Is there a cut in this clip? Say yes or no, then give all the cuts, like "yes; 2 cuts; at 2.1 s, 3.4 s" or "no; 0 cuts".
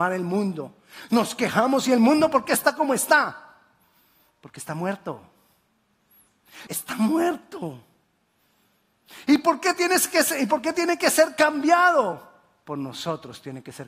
yes; 1 cut; at 6.7 s